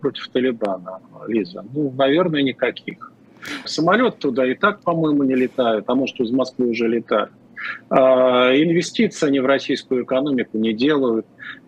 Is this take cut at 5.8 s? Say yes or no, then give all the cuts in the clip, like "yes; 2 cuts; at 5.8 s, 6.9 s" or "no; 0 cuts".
no; 1 cut; at 3.7 s